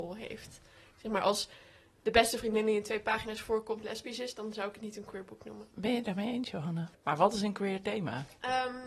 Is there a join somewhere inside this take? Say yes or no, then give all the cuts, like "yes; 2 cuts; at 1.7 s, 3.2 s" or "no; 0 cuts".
yes; 1 cut; at 7.0 s